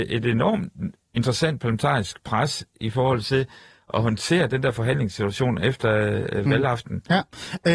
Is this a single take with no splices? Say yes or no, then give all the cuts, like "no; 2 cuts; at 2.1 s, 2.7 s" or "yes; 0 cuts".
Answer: yes; 0 cuts